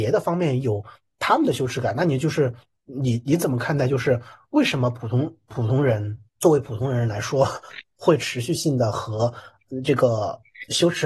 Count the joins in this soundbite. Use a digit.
1